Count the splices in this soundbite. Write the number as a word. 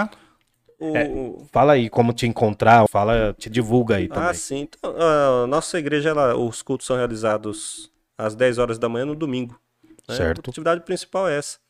one